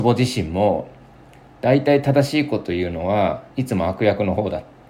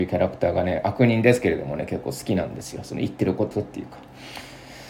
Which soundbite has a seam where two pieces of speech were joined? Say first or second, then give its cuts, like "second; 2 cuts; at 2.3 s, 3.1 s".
first; 1 cut; at 3.5 s